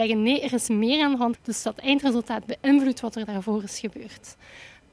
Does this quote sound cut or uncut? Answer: cut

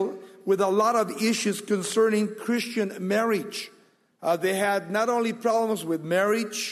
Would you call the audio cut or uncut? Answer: cut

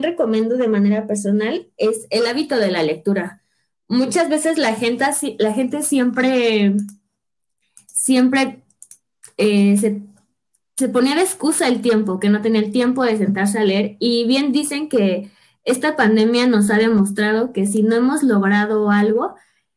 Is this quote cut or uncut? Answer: uncut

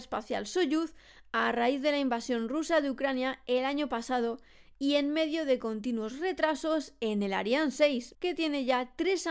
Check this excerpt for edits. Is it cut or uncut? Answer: cut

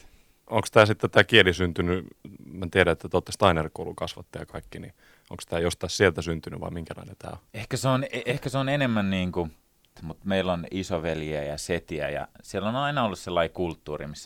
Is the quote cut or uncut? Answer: cut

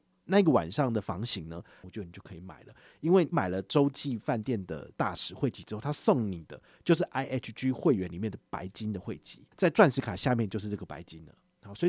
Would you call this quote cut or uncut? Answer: cut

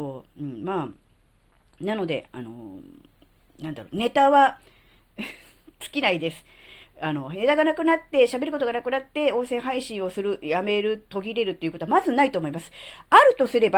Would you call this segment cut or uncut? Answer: uncut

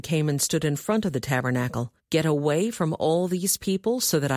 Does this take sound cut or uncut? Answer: cut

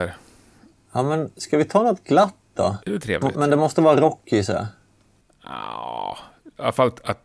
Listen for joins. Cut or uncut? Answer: cut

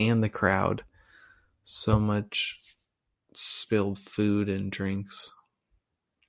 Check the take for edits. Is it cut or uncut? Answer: uncut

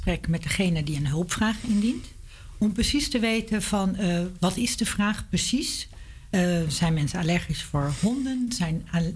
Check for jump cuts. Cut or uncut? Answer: uncut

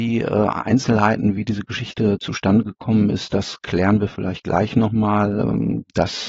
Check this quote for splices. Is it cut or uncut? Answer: uncut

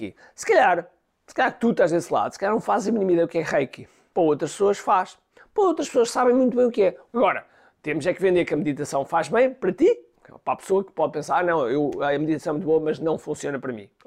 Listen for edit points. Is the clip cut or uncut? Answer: cut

